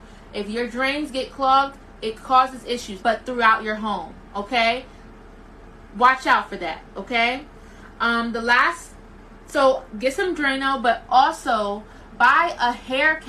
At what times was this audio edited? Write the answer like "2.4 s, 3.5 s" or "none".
3.0 s